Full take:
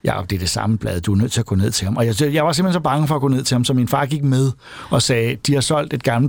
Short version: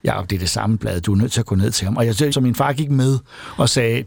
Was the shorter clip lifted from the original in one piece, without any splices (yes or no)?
no